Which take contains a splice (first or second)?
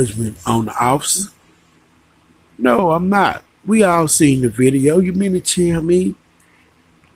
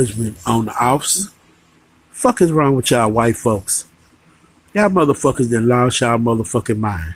second